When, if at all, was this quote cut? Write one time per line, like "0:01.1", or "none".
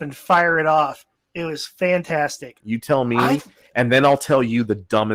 0:01.1
0:02.6